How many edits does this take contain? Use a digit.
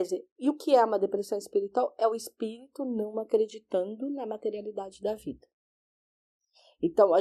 0